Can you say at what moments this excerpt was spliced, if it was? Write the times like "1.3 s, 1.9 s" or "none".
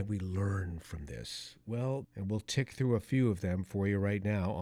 2.0 s